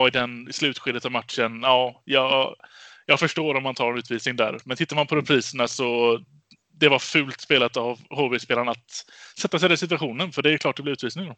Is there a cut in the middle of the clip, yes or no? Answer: no